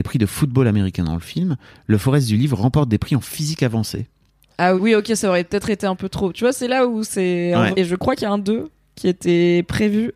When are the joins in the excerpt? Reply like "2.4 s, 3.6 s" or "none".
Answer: 4.8 s, 7.7 s